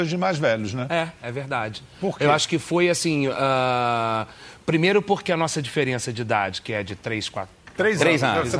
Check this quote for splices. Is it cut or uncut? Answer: cut